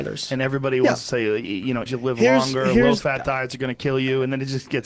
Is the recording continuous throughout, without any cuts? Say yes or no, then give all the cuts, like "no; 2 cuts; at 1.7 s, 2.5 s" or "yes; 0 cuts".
no; 1 cut; at 1.9 s